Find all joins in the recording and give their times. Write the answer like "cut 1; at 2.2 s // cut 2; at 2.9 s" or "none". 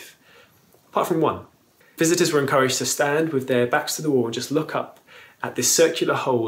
cut 1; at 1.8 s